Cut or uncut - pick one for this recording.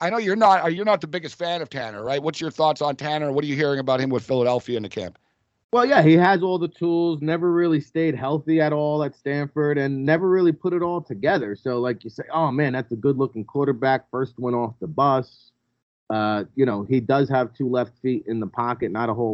uncut